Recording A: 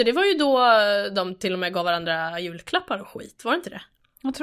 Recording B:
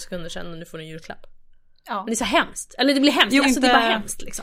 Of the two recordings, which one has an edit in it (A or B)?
B